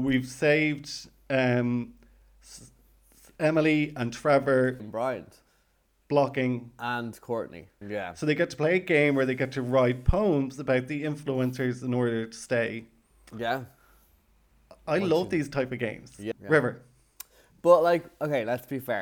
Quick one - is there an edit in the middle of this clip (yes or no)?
yes